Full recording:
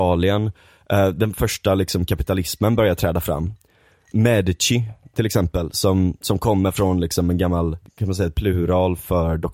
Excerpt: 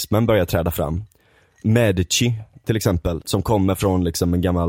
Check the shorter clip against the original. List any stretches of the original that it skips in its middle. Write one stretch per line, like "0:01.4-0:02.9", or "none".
0:05.7-0:06.2

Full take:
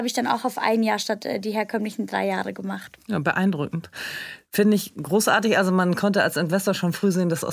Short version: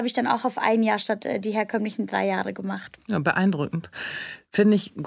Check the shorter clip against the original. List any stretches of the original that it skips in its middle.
none

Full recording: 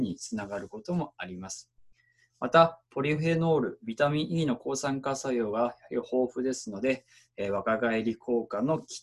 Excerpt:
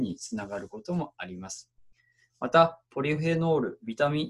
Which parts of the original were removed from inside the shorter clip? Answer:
none

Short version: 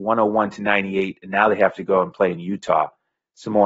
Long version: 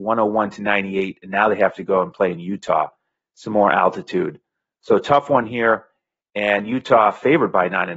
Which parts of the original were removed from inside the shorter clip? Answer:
none

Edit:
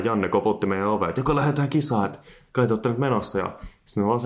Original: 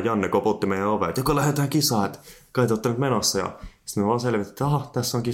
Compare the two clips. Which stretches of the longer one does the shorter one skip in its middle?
none

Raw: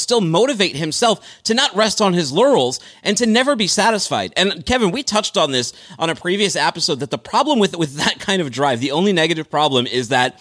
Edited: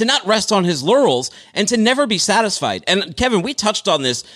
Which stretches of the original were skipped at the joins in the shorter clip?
none

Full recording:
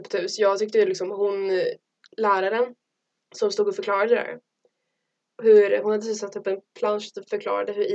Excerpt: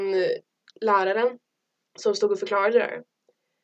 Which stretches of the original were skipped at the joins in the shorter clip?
none

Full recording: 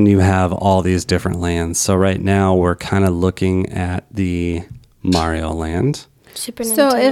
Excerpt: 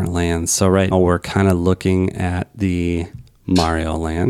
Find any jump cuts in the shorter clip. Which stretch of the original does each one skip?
0:02.2-0:02.5

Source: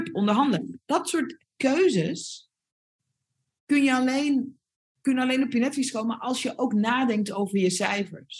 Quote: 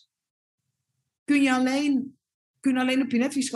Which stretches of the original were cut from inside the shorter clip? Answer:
none

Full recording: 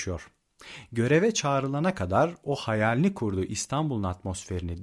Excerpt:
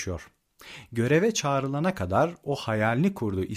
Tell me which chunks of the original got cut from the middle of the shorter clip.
none

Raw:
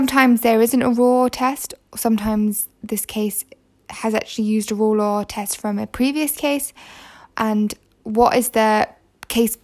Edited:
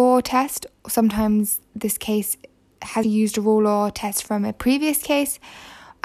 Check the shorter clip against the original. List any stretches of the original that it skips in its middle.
0:04.1-0:04.4

